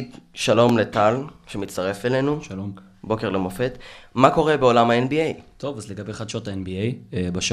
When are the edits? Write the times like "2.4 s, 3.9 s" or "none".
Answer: none